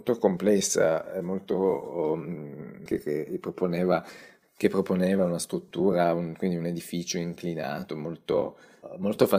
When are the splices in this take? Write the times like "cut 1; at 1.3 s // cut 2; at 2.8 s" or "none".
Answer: cut 1; at 2.9 s